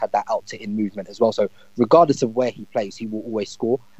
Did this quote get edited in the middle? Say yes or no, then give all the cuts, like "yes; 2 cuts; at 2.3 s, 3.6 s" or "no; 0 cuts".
no; 0 cuts